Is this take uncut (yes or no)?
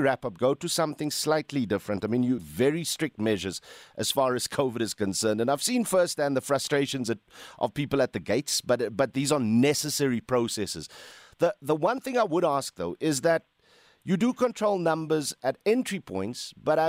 no